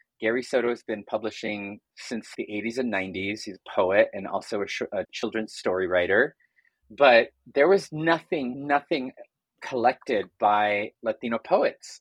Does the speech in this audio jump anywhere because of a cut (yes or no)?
no